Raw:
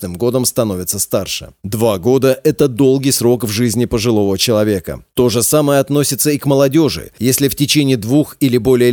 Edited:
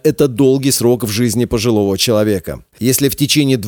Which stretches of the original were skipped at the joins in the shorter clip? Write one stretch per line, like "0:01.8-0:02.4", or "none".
0:05.1-0:07.1